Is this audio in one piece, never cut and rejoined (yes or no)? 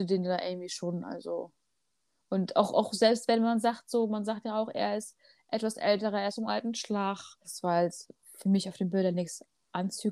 no